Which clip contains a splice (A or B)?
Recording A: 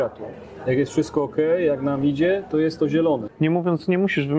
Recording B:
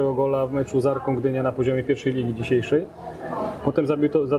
A